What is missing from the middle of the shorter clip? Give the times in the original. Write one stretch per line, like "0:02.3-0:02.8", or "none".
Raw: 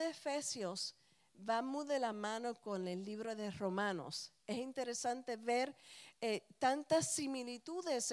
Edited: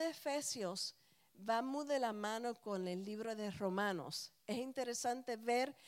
none